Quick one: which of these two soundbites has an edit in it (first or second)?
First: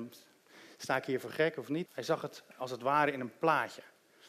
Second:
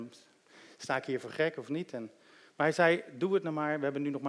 first